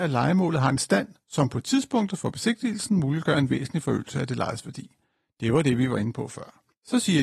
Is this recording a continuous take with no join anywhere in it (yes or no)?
yes